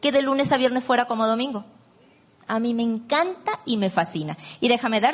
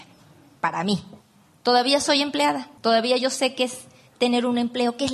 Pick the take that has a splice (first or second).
second